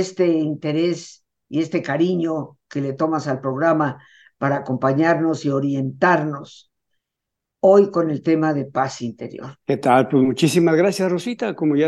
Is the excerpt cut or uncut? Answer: cut